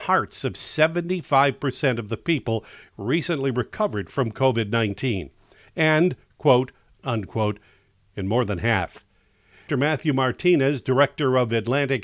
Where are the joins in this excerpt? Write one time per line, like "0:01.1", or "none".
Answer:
0:07.0
0:09.7